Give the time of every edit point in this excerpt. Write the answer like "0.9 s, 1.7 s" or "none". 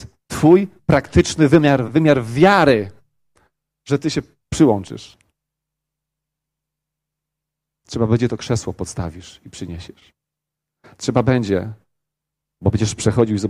1.9 s